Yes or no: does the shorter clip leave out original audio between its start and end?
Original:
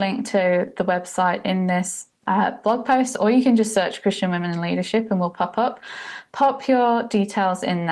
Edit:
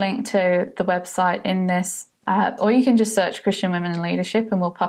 yes